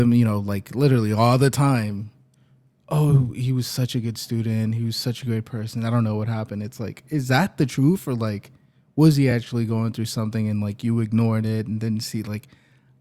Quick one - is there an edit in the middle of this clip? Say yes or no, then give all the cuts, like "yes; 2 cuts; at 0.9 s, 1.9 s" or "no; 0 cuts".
no; 0 cuts